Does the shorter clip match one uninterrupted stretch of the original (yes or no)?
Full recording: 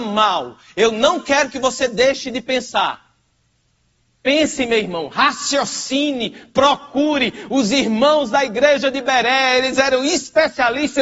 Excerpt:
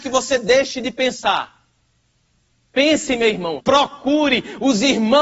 no